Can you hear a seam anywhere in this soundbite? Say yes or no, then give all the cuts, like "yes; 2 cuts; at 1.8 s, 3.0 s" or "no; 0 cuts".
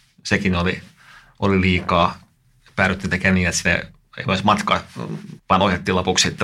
yes; 1 cut; at 5.4 s